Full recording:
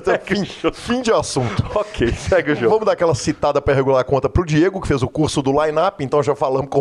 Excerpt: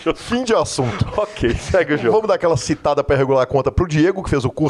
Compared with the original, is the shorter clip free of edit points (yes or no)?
yes